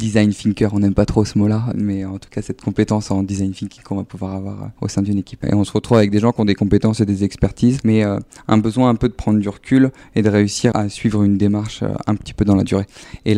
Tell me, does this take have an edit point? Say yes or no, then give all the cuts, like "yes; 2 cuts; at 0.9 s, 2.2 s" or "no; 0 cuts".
yes; 3 cuts; at 1.7 s, 5.4 s, 10.7 s